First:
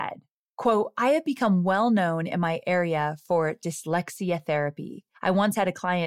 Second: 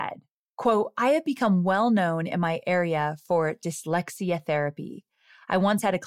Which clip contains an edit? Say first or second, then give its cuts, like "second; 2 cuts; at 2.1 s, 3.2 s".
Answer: first; 1 cut; at 5.1 s